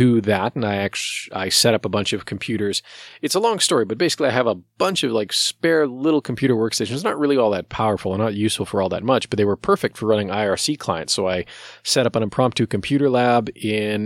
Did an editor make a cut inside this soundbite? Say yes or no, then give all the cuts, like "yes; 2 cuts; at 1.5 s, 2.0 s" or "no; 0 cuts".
no; 0 cuts